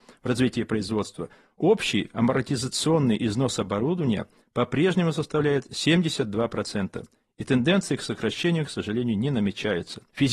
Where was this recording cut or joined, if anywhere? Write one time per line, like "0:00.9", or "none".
none